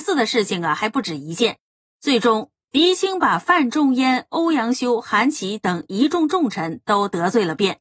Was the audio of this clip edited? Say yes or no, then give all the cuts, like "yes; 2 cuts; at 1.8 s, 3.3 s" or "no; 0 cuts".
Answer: no; 0 cuts